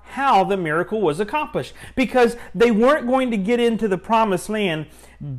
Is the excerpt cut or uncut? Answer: uncut